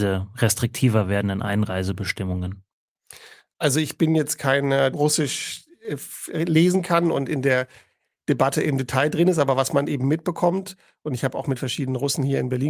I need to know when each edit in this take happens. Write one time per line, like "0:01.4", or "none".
0:04.9

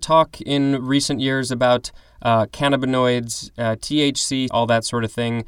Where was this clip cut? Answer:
0:04.5

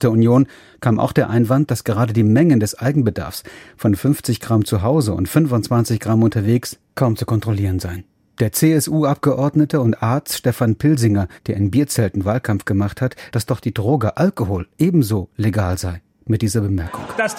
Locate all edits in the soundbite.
0:11.4
0:13.3

